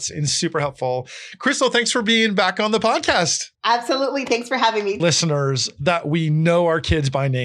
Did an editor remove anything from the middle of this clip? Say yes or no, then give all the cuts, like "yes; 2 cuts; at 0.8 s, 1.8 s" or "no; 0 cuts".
yes; 2 cuts; at 3.5 s, 5.0 s